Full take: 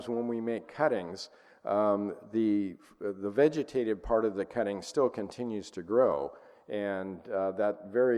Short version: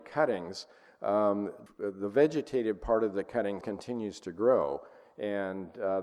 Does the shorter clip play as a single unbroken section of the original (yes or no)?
no